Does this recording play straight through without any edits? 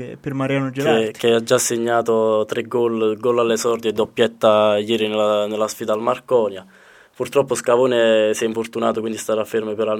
yes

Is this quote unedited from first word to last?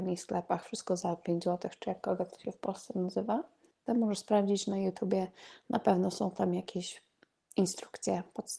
no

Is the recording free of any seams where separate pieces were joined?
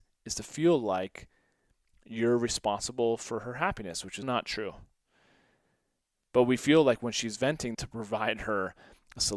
no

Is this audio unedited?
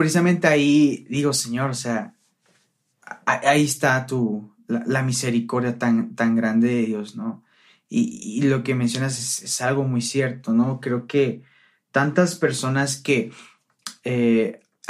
yes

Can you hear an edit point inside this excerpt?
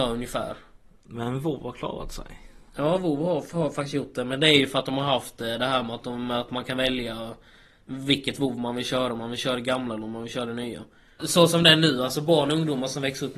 yes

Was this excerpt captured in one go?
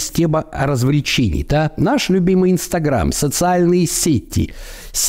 yes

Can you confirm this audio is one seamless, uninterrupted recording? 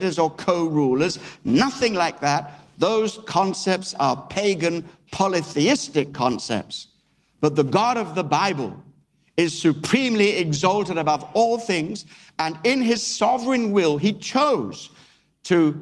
yes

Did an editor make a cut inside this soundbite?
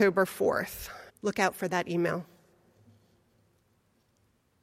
yes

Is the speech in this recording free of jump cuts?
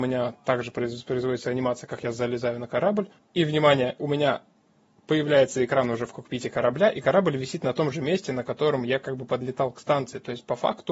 no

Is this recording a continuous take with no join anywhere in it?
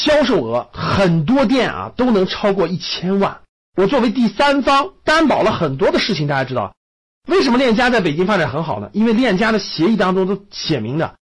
no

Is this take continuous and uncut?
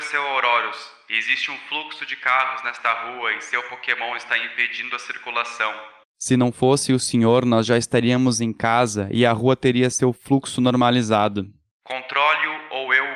no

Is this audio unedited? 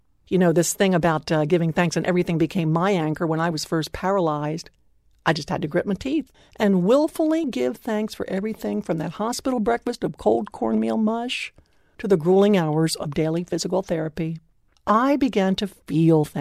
no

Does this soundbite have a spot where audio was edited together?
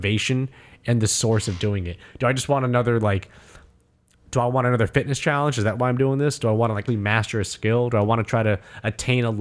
yes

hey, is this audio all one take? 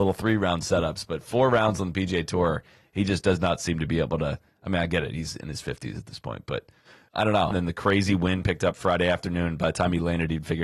no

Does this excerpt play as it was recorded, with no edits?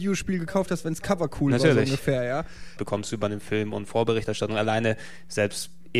no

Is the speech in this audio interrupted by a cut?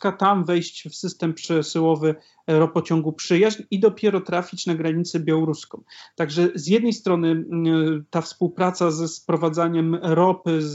yes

